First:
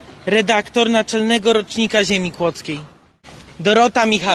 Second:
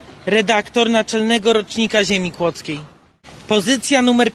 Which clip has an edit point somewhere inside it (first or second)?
first